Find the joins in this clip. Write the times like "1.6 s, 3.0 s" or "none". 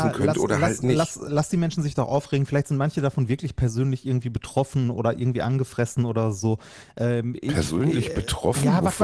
none